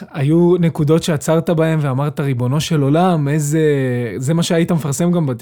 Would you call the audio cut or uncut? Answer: uncut